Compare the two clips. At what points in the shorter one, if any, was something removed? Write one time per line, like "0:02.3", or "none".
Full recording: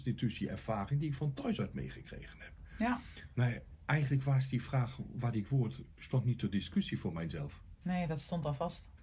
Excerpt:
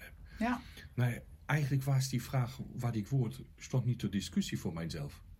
none

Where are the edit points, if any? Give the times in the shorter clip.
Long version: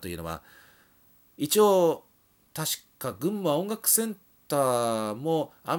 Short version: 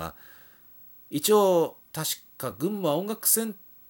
0:01.8

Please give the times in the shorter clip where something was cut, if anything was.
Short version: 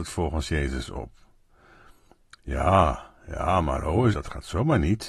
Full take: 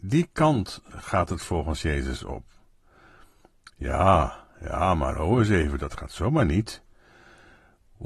0:04.1

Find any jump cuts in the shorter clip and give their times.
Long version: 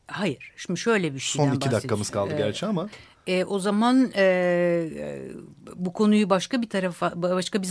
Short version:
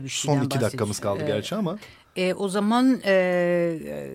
none

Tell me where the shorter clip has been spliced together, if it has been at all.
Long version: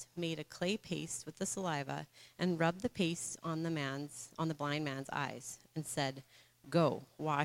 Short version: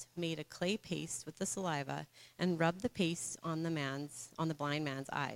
none

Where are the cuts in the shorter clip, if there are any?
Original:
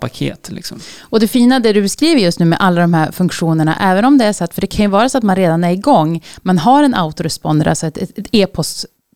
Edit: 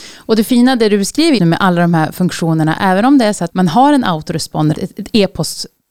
0:01.4
0:03.5
0:04.7

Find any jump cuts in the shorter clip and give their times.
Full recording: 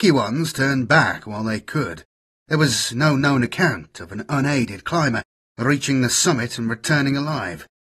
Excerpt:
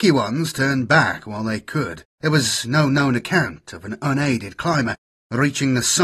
0:02.1

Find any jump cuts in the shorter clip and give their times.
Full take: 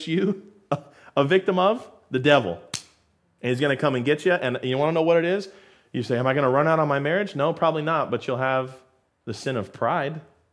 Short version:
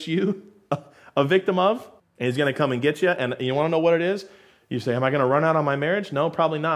0:02.0

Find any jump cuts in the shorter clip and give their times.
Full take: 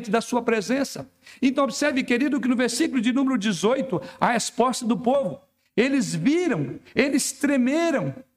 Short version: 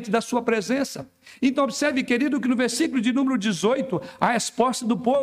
none

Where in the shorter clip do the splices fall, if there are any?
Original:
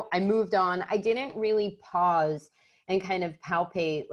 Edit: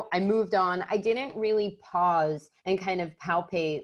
0:02.6

